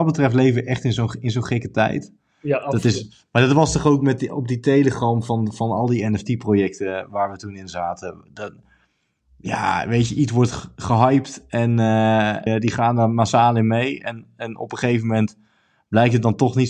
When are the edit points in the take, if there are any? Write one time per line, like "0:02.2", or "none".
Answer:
0:12.5